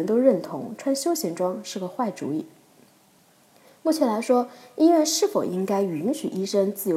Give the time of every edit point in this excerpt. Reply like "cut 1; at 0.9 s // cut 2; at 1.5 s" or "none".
none